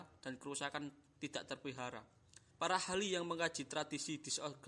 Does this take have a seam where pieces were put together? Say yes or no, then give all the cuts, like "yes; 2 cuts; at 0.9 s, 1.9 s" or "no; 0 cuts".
yes; 1 cut; at 2.5 s